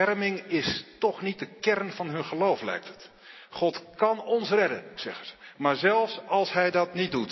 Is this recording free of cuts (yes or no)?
no